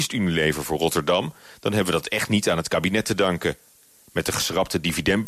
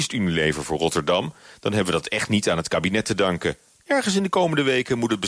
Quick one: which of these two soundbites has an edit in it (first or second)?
second